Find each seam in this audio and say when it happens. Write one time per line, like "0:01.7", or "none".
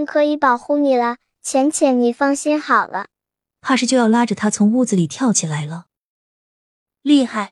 0:03.4